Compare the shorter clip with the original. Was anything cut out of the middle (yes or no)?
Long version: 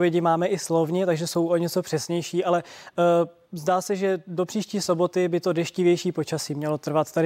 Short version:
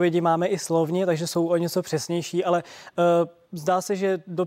no